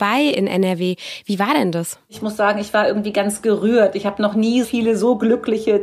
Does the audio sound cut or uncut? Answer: cut